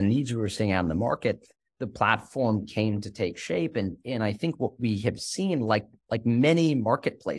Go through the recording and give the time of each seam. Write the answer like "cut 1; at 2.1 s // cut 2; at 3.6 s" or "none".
none